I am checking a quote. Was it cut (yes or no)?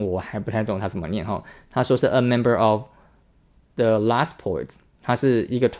no